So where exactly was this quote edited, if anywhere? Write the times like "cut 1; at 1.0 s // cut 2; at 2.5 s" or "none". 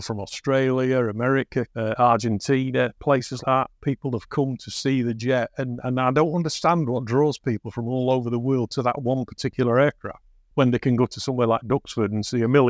cut 1; at 1.7 s // cut 2; at 3.4 s // cut 3; at 5.8 s